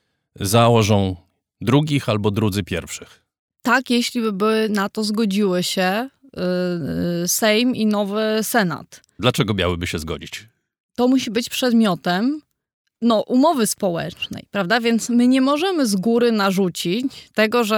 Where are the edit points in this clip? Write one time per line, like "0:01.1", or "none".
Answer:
0:09.2